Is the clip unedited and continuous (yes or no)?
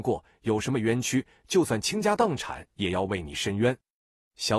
no